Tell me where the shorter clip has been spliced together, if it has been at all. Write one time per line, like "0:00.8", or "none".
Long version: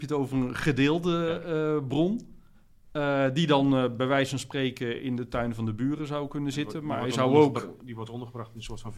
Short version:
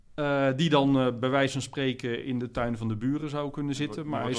none